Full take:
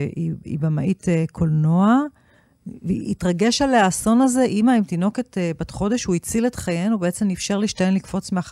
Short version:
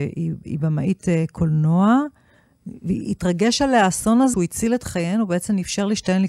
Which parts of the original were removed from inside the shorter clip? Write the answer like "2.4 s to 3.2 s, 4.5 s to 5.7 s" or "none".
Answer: 4.3 s to 6.1 s